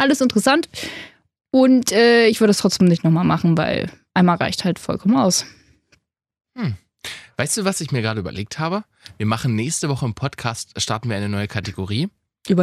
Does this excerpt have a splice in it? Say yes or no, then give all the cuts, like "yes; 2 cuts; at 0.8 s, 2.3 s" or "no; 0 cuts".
no; 0 cuts